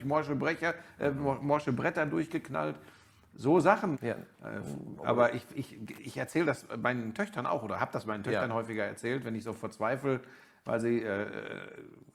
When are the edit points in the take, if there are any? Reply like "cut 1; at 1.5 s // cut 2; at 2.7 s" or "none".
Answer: cut 1; at 3.9 s